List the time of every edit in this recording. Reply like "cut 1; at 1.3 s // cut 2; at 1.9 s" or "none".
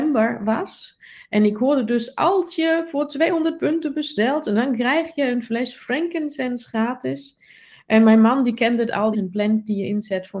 cut 1; at 9.1 s